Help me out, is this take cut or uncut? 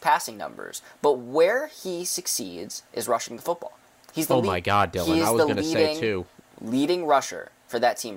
uncut